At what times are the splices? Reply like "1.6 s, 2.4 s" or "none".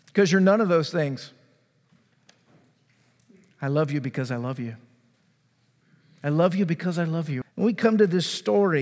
7.4 s